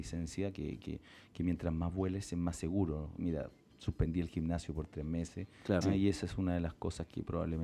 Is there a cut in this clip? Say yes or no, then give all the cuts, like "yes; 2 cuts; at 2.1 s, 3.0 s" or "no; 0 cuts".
yes; 2 cuts; at 3.2 s, 5.8 s